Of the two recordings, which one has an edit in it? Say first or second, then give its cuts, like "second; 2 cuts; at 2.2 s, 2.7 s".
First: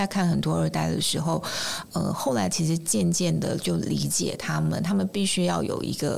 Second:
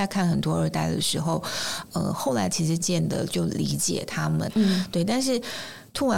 second; 2 cuts; at 2.8 s, 4.5 s